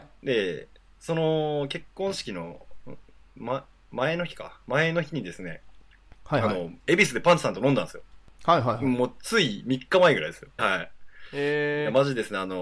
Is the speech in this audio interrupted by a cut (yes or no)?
yes